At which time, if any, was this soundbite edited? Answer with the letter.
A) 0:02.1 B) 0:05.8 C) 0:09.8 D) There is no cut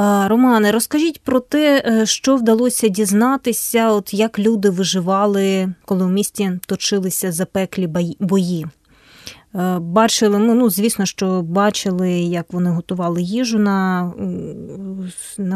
B